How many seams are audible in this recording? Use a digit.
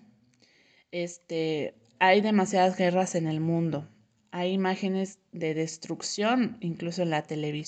0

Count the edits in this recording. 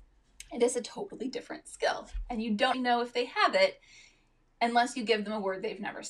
1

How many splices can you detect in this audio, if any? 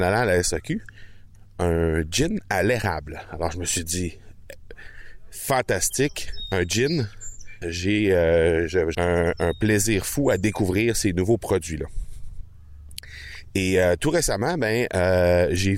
2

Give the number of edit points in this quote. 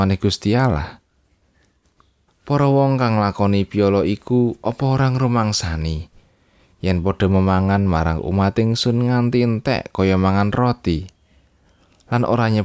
1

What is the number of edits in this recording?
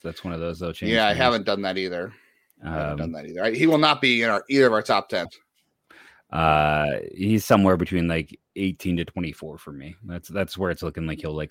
1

